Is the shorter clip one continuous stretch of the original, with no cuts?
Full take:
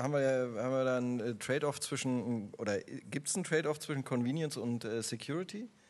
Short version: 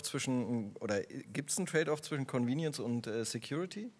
yes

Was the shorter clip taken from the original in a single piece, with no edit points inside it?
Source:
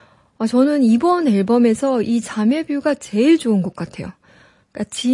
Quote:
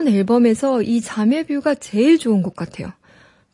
yes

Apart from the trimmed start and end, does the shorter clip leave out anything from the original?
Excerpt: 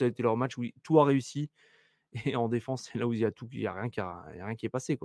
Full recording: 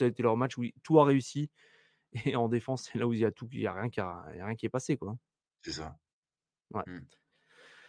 no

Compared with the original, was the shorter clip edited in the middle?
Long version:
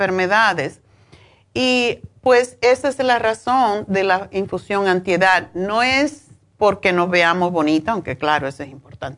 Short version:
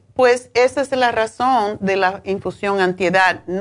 no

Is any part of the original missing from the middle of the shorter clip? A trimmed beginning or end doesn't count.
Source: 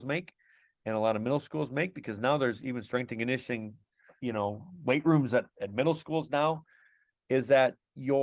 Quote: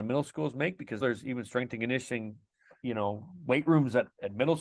yes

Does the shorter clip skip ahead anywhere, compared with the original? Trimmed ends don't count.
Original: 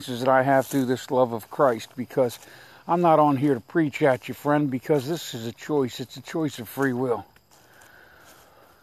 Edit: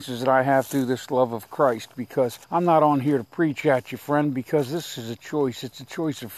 yes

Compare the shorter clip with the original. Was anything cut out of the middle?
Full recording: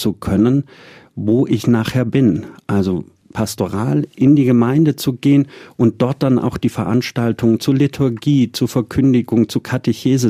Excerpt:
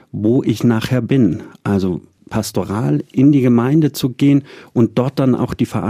no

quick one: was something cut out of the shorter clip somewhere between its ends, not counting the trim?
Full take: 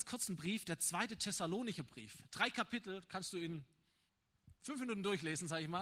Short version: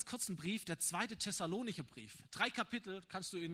no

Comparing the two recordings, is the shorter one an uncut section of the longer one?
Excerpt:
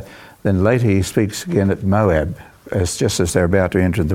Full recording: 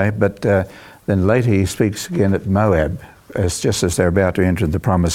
yes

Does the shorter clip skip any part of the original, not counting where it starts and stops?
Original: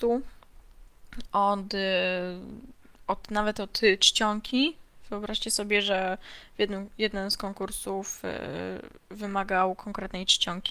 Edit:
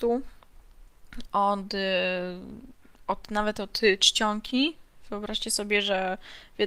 no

